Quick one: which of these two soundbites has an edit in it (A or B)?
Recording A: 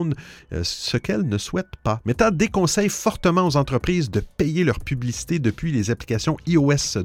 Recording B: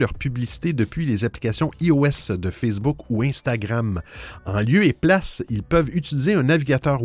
A